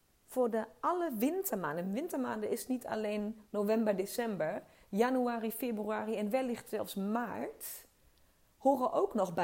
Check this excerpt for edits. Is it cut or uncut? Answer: uncut